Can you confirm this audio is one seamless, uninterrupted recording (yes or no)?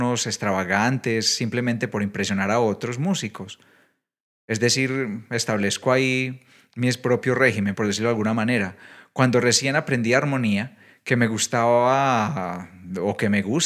yes